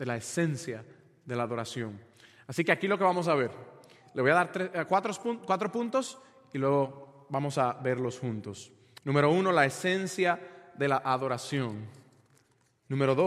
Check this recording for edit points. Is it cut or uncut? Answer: uncut